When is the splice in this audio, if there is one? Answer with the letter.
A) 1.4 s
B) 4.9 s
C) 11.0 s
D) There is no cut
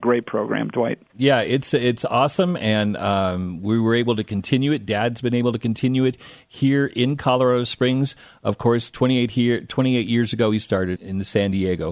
C